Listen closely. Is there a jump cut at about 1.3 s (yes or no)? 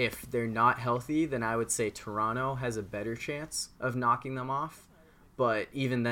no